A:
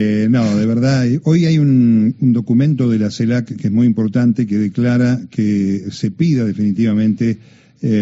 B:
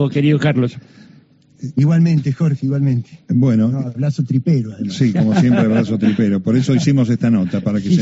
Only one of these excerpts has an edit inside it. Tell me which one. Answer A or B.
B